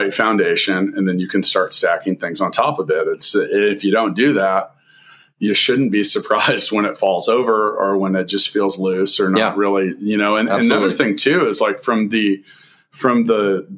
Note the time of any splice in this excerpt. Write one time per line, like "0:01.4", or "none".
none